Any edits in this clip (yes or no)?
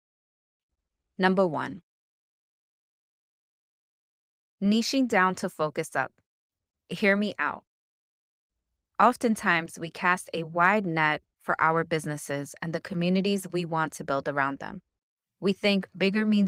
no